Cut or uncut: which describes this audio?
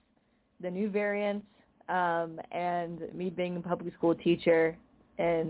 uncut